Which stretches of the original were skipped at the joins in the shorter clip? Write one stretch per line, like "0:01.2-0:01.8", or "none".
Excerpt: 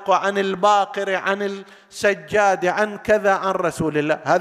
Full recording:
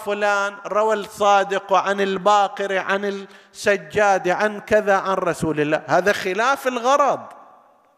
none